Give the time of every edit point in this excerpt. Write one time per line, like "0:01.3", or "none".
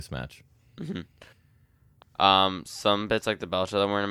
0:02.0